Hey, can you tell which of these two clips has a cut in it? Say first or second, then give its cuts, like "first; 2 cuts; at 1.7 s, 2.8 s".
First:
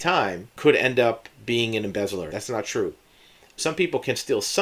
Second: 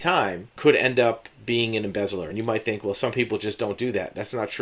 first; 2 cuts; at 2.3 s, 3.6 s